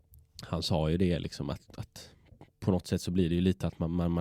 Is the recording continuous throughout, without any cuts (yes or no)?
yes